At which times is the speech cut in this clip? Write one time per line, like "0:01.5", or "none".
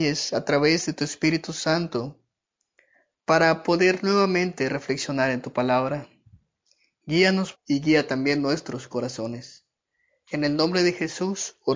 0:07.5